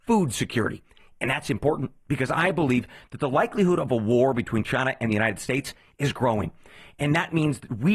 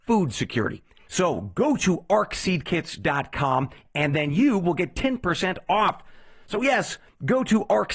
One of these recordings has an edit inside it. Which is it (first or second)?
second